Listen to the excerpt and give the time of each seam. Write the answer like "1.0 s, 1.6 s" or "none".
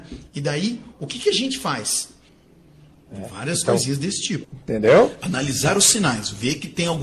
2.3 s, 4.4 s